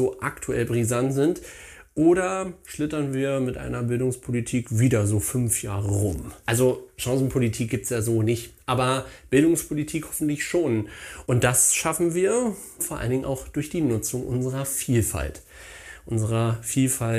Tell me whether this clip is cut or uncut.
cut